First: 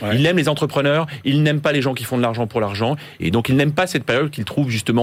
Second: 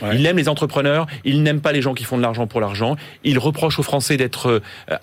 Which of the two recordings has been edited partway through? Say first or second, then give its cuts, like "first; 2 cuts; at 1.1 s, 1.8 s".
first; 1 cut; at 3.2 s